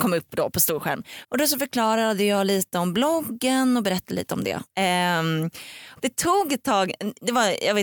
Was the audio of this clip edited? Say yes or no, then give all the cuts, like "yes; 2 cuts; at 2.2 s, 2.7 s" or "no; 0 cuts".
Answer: yes; 3 cuts; at 1.2 s, 4.7 s, 6.0 s